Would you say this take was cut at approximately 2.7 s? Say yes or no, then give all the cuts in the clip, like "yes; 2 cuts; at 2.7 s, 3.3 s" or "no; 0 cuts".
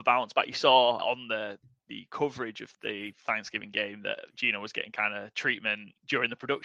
yes; 2 cuts; at 1.0 s, 2.7 s